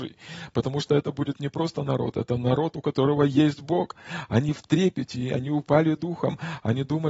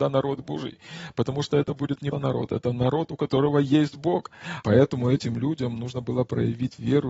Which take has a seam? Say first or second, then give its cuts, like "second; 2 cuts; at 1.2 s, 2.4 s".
second; 2 cuts; at 2.1 s, 4.6 s